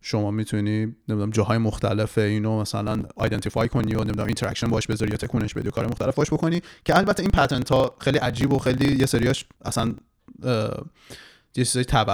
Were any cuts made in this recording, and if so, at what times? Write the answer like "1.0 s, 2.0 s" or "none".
1.0 s, 9.5 s